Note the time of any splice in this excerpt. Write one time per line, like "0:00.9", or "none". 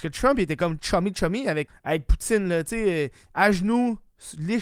0:01.7